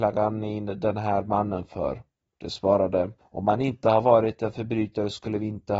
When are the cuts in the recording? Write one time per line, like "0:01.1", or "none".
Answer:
0:03.2